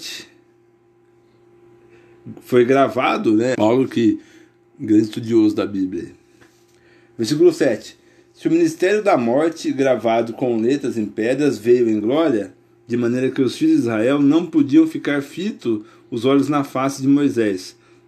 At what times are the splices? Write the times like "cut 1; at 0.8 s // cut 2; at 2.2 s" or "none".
cut 1; at 3.5 s